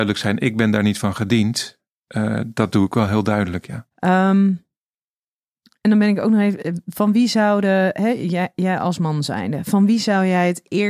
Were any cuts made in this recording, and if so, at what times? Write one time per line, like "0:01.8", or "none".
0:03.9